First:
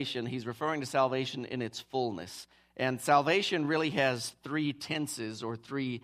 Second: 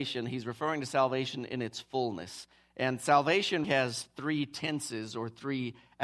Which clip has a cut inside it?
second; 1 cut; at 3.6 s

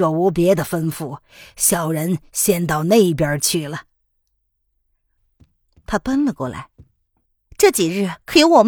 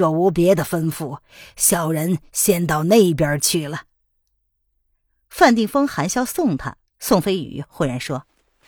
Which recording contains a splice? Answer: first; 1 cut; at 5.2 s

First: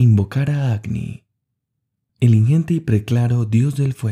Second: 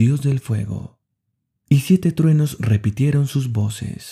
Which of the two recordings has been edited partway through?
second; 1 cut; at 1.5 s

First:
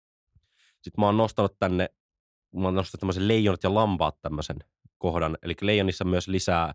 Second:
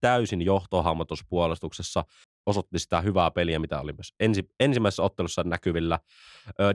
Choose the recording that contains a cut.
second; 1 cut; at 2.2 s

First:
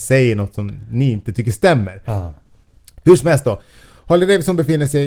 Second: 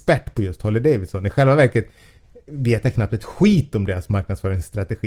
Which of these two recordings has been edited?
first; 1 cut; at 2.0 s

